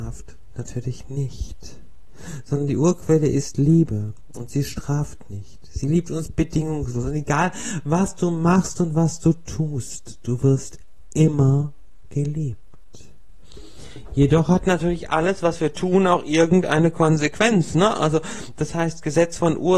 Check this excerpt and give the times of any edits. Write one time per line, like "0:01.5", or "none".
none